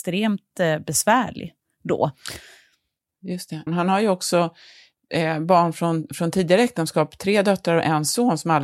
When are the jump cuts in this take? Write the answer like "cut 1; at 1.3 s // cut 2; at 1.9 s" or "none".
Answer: cut 1; at 3.7 s